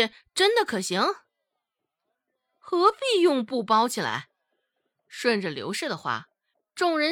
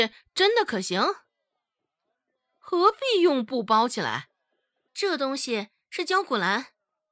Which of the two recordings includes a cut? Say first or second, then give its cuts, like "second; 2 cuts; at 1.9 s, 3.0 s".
second; 1 cut; at 4.9 s